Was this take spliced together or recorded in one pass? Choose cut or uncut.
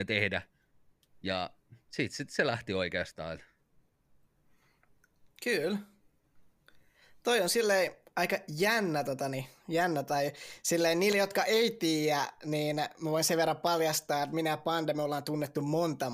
uncut